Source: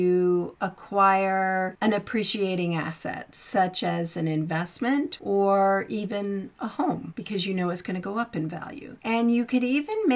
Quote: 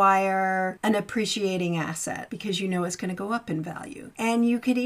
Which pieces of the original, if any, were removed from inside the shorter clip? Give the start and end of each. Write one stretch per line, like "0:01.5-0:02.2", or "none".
0:03.3-0:07.1